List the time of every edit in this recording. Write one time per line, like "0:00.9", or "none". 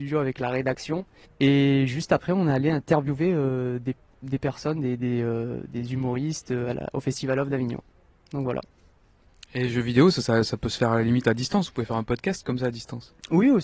0:01.2